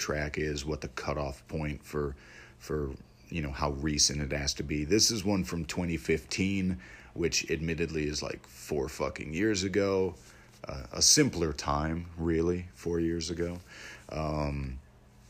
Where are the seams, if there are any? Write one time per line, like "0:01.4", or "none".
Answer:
none